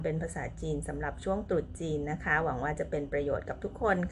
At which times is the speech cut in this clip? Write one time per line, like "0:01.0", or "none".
none